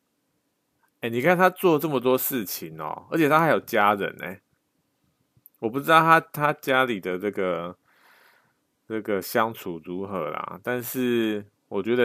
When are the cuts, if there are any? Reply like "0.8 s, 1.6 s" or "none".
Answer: none